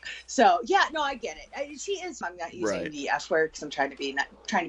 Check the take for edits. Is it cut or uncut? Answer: cut